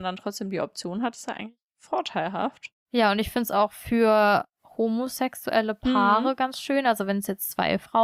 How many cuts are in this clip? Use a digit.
0